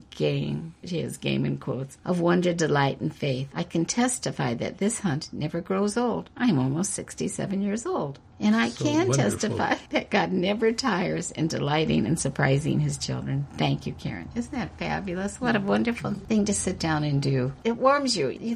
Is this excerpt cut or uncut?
uncut